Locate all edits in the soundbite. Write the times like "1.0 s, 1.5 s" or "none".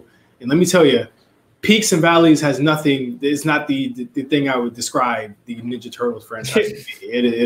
none